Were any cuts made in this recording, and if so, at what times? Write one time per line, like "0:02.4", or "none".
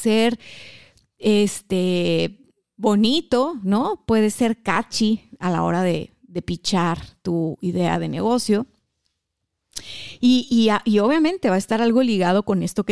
none